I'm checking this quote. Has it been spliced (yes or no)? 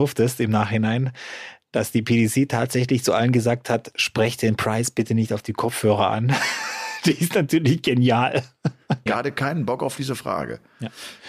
yes